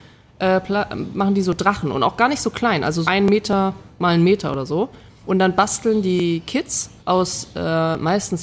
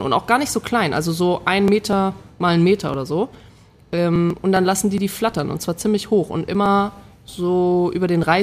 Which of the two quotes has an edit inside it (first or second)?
first